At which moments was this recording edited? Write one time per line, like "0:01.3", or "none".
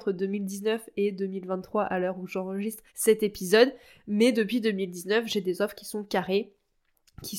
0:02.9